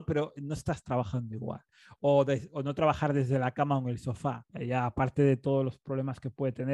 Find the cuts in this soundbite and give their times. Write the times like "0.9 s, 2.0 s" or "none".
4.5 s